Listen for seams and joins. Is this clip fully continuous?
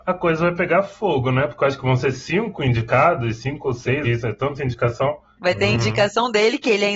no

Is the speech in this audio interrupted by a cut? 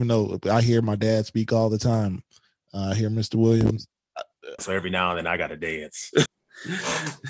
yes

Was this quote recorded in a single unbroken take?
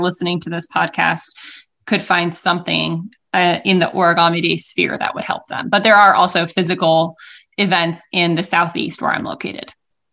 yes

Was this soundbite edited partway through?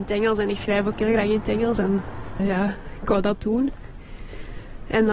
yes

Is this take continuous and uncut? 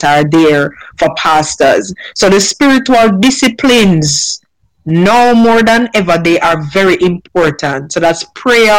yes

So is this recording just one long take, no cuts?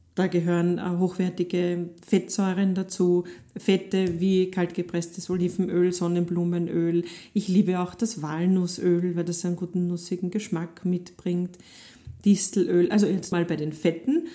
no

